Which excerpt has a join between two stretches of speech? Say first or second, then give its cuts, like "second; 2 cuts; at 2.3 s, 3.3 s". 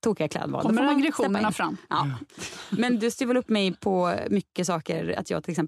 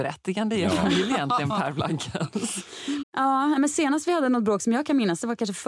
second; 1 cut; at 3.0 s